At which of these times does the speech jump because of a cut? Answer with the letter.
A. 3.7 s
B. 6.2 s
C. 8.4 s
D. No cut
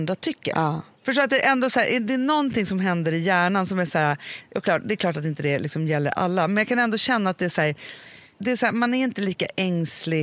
B